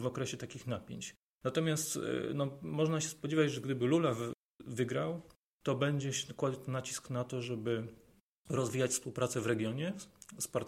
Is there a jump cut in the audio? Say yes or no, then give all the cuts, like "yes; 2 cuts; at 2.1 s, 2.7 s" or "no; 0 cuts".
no; 0 cuts